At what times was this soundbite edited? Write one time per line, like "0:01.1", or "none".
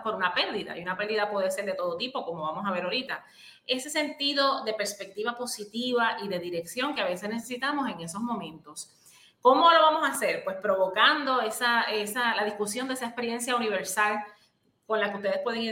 none